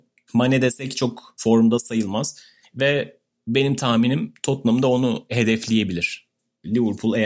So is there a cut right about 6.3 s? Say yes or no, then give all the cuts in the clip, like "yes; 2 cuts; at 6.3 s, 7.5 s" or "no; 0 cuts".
no; 1 cut; at 2.6 s